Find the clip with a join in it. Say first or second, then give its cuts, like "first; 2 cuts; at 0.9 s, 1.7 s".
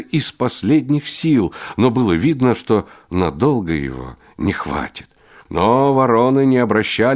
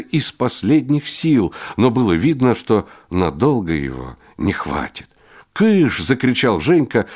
first; 1 cut; at 5.5 s